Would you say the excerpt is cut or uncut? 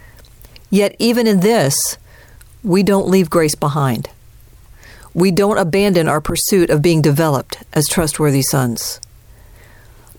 uncut